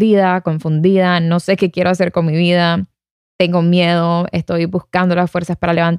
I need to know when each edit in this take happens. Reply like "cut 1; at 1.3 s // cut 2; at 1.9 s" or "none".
none